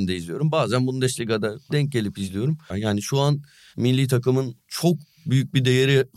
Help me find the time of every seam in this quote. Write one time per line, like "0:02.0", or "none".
0:02.7
0:04.6